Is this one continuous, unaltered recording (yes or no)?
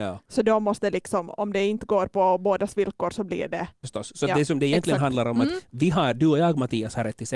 no